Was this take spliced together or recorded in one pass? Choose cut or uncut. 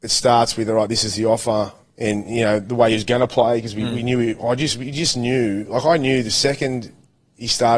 cut